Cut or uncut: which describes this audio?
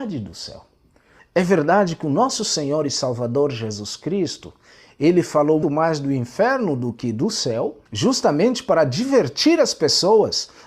cut